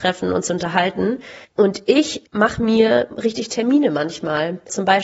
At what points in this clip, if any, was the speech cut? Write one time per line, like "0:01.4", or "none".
0:01.4
0:03.1